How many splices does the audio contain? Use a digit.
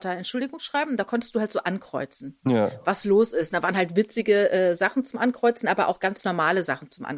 0